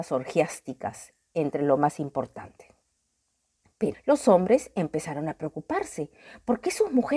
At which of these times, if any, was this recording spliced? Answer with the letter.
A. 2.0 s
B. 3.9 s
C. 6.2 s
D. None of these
B